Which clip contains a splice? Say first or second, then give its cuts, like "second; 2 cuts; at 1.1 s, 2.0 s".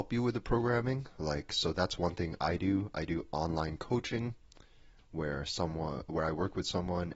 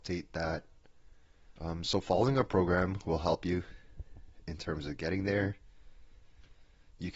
second; 1 cut; at 1.6 s